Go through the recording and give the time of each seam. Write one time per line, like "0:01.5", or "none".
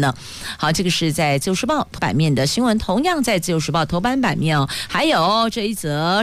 0:02.0